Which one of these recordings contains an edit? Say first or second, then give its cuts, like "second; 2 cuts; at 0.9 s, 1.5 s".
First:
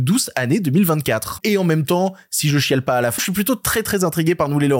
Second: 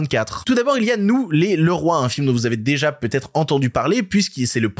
first; 2 cuts; at 1.4 s, 3.2 s